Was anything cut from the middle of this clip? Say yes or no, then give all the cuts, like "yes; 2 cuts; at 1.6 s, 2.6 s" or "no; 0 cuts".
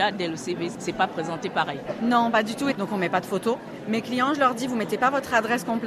yes; 1 cut; at 2.7 s